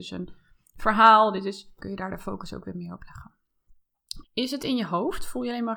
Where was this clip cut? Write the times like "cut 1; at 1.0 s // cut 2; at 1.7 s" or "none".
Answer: cut 1; at 1.8 s // cut 2; at 4.2 s